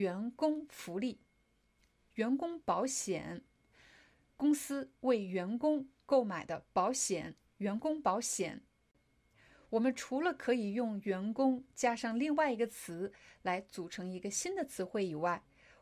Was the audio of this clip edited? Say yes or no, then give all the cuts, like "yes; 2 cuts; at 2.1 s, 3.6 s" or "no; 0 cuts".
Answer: no; 0 cuts